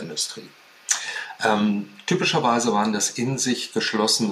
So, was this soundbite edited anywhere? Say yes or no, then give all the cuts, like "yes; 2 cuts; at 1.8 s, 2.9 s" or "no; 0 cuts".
no; 0 cuts